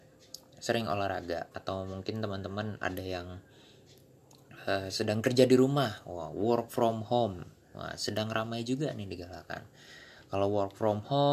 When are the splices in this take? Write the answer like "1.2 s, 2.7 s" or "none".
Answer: 1.5 s